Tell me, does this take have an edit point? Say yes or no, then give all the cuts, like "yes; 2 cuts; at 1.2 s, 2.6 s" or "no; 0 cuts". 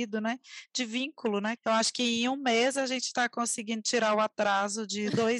yes; 1 cut; at 1.6 s